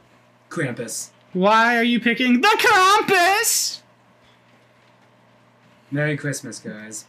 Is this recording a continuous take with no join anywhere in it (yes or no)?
yes